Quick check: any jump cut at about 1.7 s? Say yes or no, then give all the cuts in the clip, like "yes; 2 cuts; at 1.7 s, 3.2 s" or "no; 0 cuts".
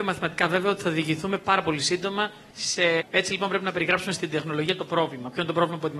no; 1 cut; at 3.0 s